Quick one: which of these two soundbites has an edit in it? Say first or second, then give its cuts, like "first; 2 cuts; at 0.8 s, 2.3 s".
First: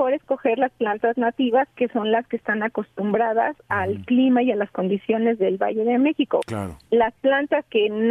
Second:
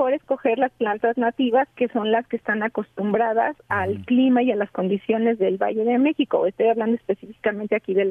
first; 1 cut; at 6.4 s